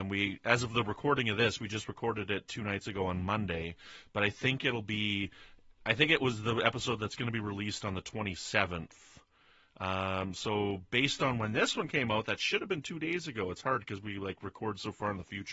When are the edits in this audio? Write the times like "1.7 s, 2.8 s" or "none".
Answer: none